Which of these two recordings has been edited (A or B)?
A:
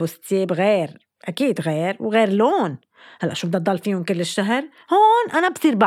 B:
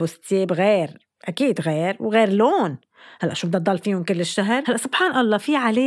B